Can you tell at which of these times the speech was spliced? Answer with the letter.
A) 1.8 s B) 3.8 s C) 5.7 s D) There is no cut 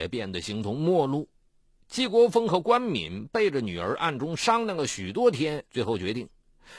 C